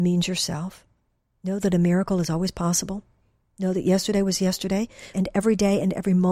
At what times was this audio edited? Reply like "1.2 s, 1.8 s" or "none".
5.1 s